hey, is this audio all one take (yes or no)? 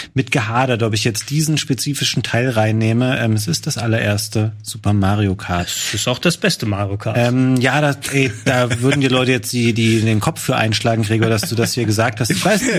yes